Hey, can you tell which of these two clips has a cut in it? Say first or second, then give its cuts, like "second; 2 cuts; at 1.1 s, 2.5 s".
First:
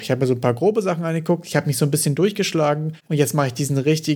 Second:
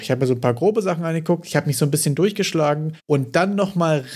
second; 1 cut; at 3.0 s